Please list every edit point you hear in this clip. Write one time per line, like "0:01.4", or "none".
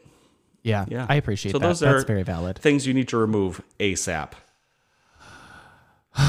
none

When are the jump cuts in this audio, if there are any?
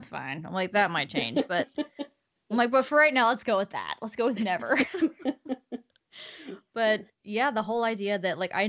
none

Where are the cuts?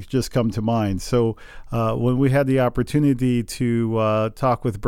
none

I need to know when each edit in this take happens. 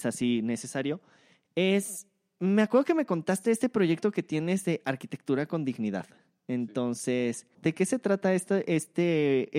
0:07.5

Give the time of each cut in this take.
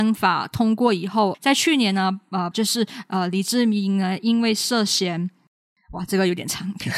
0:02.5

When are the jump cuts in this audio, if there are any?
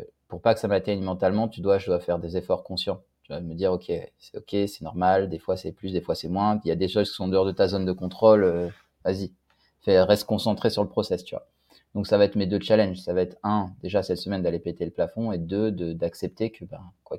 none

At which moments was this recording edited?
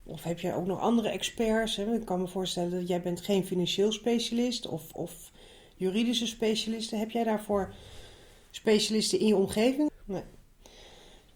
0:09.9

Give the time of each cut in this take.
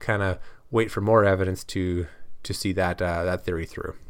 none

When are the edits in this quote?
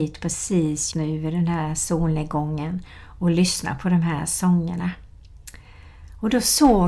0:00.9

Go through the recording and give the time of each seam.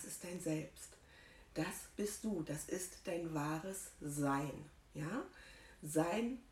none

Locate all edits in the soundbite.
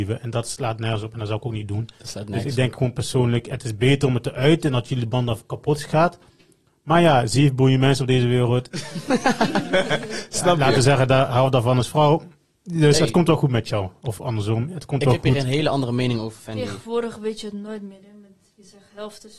none

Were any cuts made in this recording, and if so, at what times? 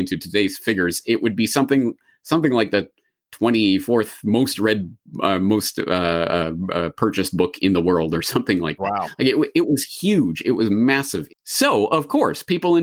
0:11.3

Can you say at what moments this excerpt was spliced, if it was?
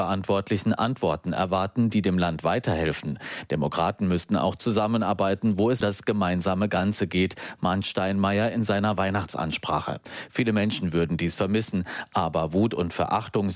0:05.8

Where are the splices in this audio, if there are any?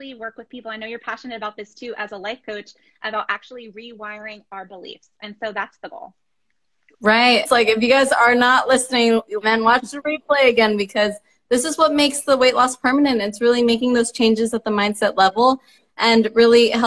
0:07.5
0:09.4

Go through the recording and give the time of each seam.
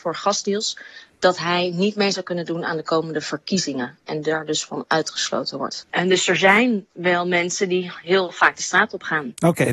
0:05.8

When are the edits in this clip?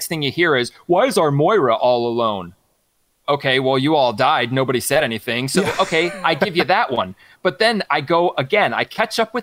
none

